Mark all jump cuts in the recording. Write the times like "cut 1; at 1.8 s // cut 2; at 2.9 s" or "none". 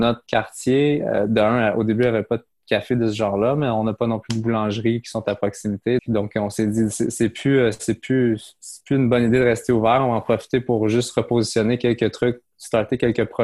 cut 1; at 6.0 s